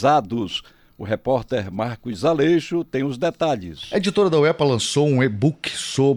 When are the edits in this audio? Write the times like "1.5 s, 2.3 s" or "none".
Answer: none